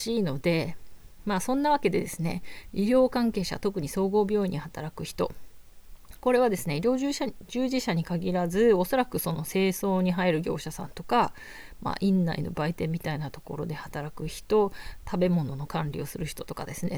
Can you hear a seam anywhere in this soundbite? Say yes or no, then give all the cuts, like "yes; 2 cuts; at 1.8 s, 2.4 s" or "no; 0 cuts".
no; 0 cuts